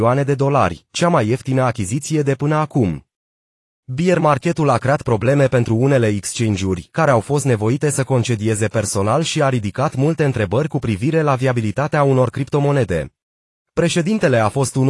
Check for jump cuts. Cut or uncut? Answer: cut